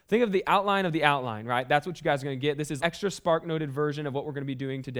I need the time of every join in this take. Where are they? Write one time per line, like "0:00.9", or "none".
0:02.8